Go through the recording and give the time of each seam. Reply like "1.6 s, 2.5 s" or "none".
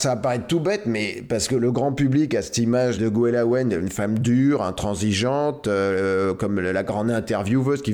3.0 s